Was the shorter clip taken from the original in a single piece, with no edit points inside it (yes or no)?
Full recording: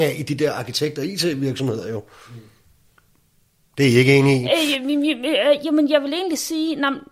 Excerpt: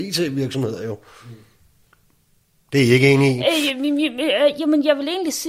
yes